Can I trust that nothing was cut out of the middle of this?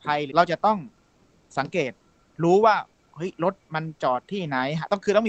yes; 0 cuts

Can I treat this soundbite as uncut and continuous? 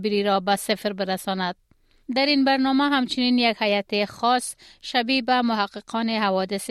no; 1 cut; at 2.0 s

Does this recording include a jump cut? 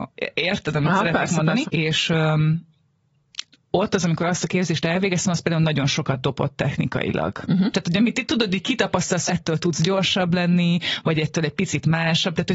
yes; 3 cuts; at 1.6 s, 7.7 s, 9.3 s

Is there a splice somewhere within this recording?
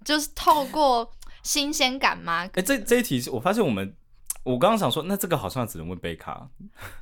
no; 0 cuts

